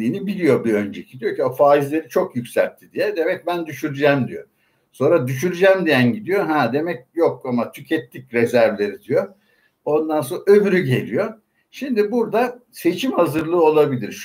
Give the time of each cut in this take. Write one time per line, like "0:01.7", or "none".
none